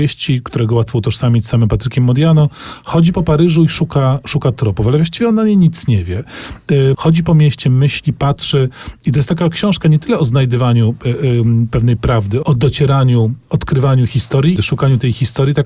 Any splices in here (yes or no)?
yes